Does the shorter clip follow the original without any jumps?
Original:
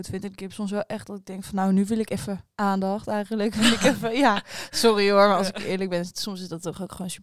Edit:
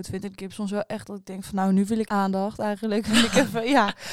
no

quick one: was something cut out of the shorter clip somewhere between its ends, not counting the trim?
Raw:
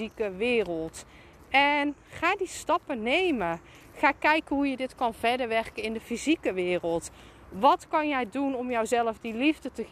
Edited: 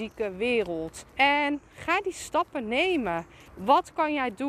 yes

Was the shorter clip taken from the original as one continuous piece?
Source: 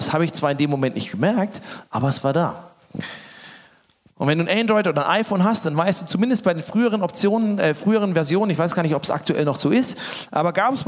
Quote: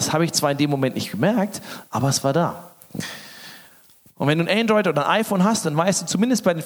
yes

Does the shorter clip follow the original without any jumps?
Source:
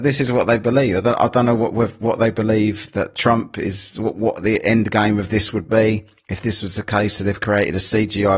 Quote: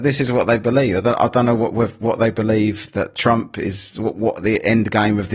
yes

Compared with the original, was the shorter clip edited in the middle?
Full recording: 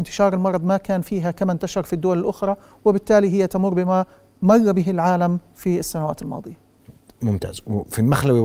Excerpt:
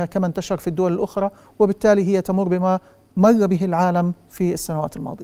no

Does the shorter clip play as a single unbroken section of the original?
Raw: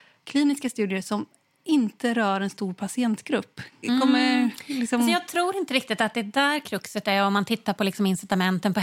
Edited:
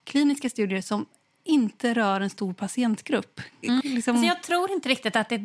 no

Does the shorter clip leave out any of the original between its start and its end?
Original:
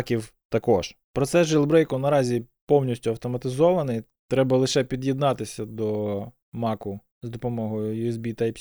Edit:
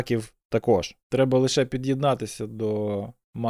yes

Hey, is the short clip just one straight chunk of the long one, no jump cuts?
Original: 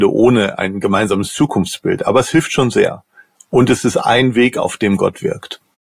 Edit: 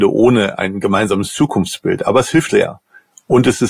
no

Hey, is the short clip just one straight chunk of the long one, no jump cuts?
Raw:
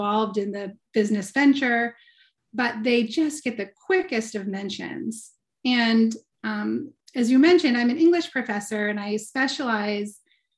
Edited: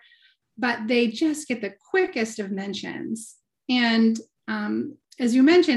yes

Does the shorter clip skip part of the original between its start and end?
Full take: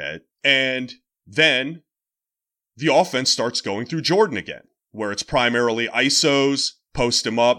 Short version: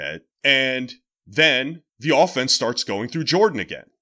yes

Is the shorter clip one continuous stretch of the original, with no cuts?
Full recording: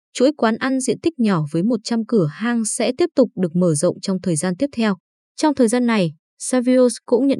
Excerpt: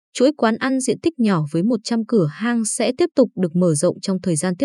yes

